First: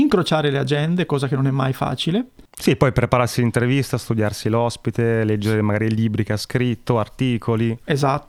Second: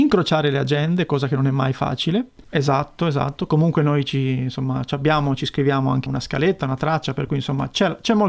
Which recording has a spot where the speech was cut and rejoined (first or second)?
second